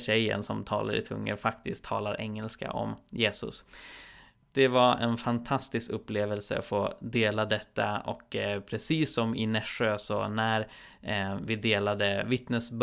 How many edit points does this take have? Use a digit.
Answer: 1